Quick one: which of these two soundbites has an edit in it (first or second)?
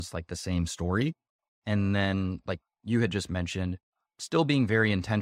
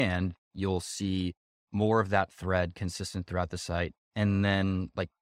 second